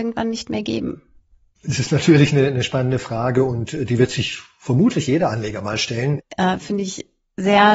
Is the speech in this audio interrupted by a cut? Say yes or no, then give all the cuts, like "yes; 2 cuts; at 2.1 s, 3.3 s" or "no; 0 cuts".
yes; 1 cut; at 6.2 s